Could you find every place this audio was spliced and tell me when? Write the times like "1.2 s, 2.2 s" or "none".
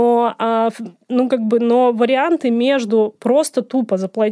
none